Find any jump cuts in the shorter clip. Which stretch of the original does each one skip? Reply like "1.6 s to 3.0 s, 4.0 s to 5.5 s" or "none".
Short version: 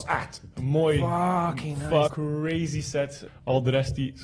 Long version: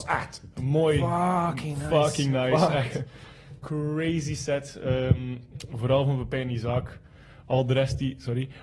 2.1 s to 3.6 s, 4.8 s to 7.3 s